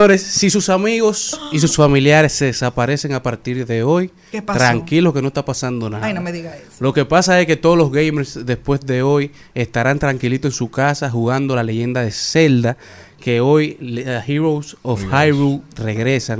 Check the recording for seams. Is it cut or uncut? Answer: uncut